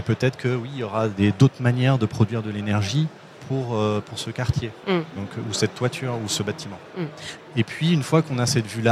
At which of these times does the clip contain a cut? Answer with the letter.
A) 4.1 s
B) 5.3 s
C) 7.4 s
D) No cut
C